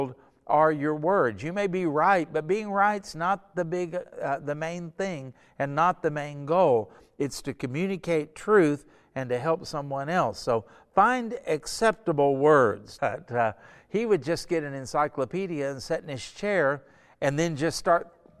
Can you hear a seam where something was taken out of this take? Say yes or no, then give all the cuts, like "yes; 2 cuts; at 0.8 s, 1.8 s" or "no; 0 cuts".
yes; 1 cut; at 13.0 s